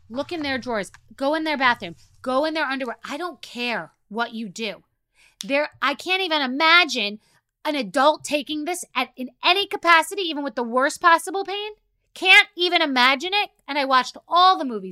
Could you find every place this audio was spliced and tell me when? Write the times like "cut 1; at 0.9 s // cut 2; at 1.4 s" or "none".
none